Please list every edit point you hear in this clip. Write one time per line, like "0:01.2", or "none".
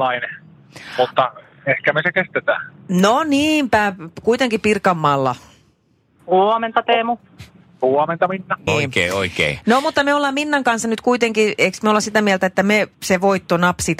0:06.2
0:08.7